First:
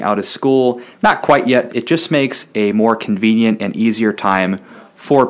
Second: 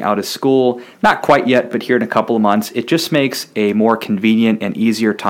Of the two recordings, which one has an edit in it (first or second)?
first